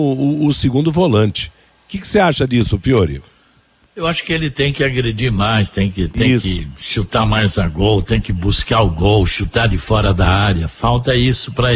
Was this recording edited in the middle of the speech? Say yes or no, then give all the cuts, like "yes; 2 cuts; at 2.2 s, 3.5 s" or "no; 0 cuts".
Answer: no; 0 cuts